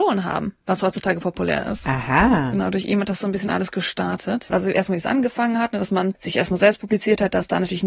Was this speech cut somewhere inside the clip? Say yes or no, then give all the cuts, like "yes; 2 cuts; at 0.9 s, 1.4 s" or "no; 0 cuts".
yes; 1 cut; at 4.5 s